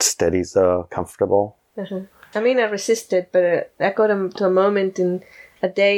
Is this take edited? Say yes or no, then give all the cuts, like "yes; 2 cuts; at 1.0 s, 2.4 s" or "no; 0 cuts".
yes; 1 cut; at 2.3 s